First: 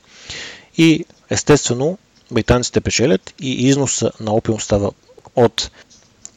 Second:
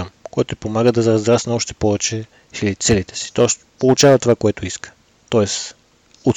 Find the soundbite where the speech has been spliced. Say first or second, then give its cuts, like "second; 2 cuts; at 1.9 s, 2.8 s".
second; 1 cut; at 5.2 s